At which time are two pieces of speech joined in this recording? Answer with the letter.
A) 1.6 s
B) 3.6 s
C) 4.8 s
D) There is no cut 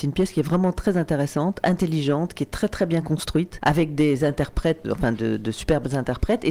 C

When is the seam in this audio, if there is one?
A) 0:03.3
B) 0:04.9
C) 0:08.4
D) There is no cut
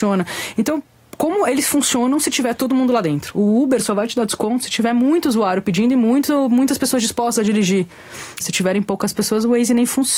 C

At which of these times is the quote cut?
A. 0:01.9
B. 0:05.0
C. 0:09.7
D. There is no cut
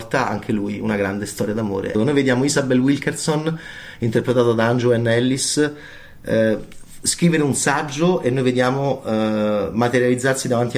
A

